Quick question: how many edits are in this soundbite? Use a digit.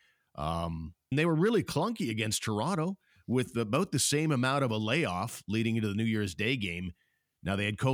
1